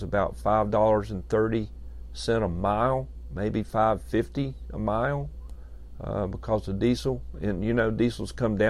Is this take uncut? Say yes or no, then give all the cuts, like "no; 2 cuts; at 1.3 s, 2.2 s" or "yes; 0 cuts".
yes; 0 cuts